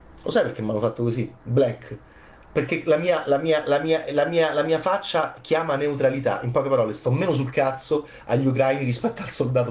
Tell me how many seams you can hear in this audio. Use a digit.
1